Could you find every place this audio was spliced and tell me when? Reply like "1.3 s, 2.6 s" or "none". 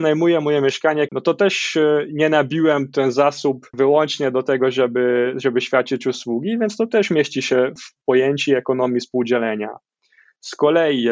1.1 s